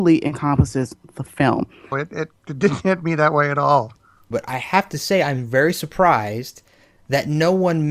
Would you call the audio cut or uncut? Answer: cut